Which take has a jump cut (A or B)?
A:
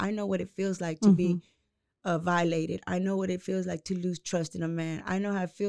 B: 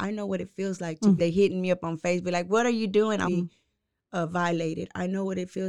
B